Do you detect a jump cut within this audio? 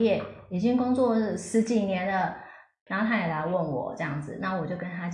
yes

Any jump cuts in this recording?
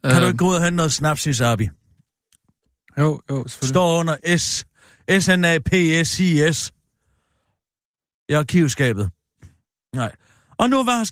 no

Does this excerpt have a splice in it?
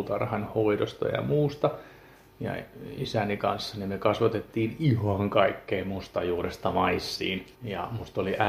yes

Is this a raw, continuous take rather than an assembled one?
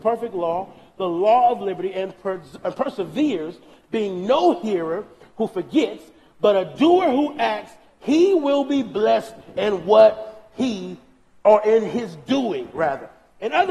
yes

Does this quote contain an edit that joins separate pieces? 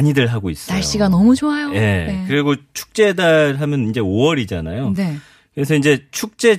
no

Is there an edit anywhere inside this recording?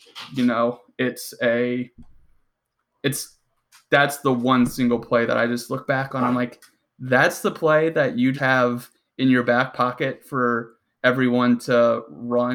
yes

